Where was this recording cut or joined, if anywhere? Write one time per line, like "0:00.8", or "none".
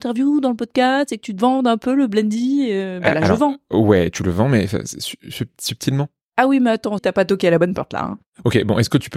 0:07.0